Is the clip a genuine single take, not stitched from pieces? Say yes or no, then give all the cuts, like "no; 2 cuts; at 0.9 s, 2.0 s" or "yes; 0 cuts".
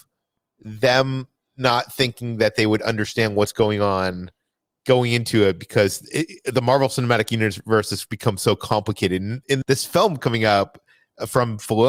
no; 1 cut; at 9.6 s